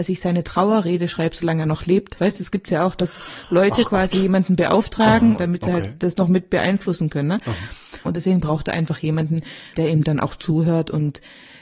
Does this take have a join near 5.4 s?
yes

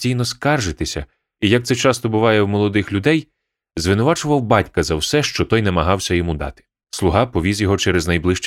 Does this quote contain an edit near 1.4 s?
no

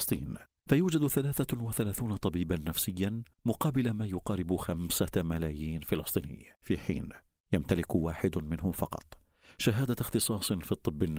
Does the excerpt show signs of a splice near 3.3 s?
yes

